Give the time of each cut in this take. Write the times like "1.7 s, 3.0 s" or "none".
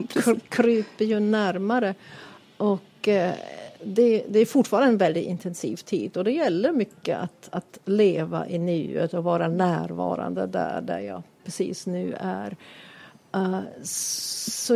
none